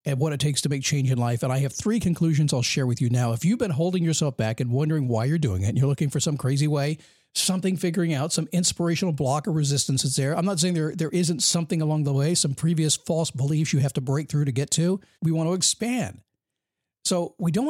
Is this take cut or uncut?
cut